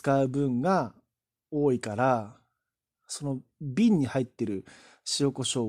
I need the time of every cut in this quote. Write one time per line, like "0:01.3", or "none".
none